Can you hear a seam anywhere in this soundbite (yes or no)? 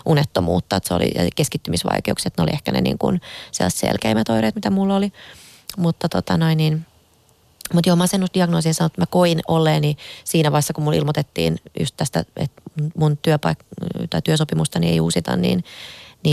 no